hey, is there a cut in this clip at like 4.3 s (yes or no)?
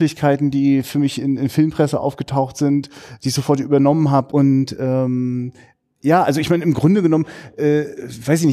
yes